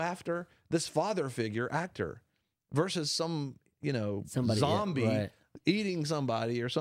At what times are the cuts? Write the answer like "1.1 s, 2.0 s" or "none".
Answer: none